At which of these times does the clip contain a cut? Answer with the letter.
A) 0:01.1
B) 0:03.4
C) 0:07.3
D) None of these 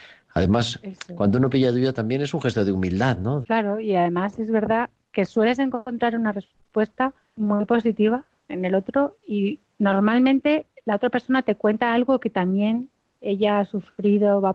B